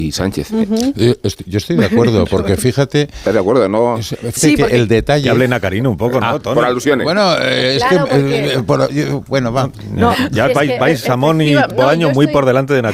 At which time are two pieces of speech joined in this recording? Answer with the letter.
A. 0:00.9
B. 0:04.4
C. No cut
B